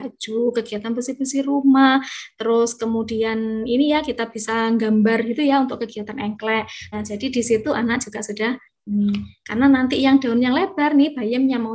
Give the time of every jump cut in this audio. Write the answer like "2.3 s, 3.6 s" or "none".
6.9 s